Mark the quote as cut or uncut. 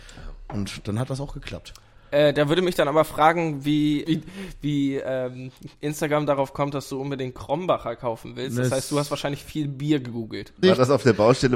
cut